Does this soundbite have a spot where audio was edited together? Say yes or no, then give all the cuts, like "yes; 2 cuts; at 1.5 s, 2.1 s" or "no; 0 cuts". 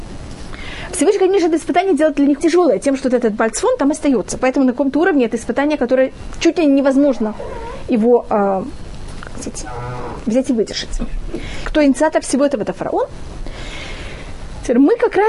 yes; 3 cuts; at 2.4 s, 4.4 s, 11.7 s